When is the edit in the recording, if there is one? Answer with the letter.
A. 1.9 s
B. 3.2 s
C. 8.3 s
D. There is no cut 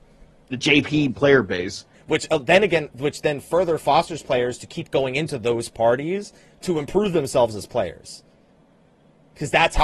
A